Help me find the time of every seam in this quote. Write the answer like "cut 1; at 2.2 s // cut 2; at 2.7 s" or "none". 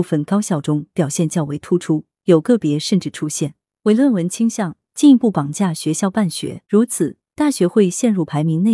cut 1; at 4.8 s // cut 2; at 6.6 s